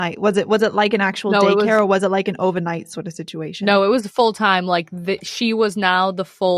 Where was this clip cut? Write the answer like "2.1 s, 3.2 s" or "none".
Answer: none